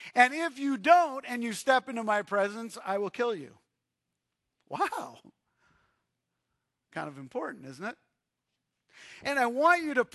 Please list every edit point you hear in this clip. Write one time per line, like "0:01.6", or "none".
0:09.2